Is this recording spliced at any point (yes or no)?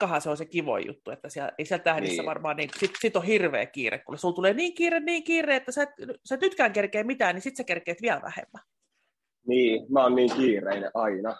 no